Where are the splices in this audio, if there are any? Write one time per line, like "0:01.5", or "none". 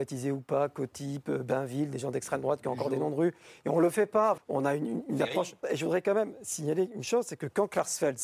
0:04.4
0:05.6